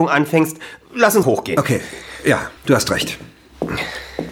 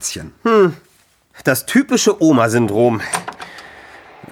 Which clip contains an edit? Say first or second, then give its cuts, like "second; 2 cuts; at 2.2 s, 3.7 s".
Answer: first; 2 cuts; at 1.2 s, 2.6 s